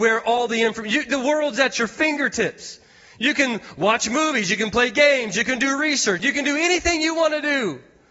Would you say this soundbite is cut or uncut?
cut